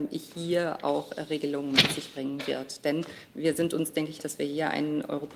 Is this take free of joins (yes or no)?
no